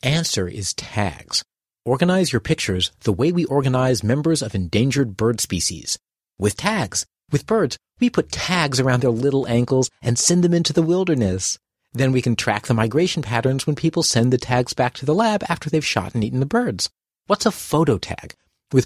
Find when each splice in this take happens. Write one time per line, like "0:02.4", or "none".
none